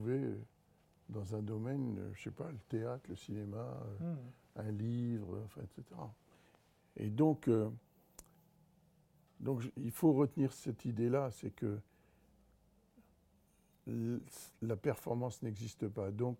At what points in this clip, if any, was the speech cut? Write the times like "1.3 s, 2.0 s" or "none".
none